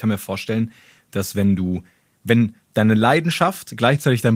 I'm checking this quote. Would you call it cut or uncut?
cut